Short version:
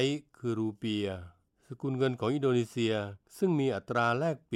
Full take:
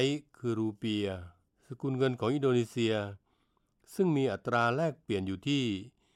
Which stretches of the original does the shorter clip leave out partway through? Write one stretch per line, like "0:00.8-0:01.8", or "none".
0:03.3-0:03.8